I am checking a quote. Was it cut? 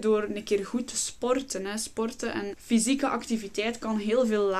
yes; 1 cut; at 2.5 s

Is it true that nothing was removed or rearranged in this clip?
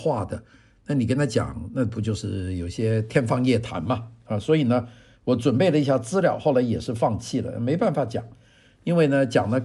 yes; 0 cuts

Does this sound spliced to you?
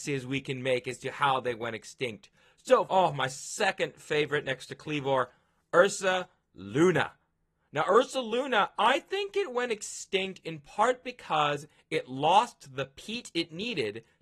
yes; 1 cut; at 2.8 s

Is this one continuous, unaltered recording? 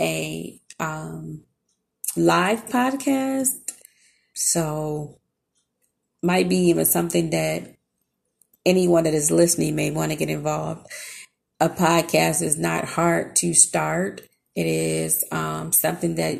no; 1 cut; at 4.3 s

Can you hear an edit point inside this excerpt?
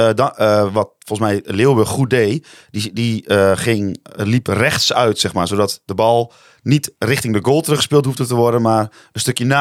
no; 0 cuts

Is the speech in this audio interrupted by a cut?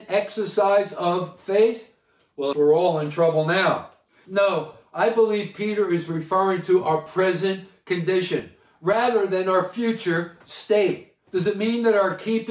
yes; 2 cuts; at 2.5 s, 11.3 s

